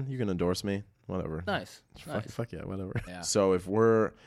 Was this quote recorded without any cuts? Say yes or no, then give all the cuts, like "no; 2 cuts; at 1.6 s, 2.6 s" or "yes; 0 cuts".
no; 1 cut; at 3.1 s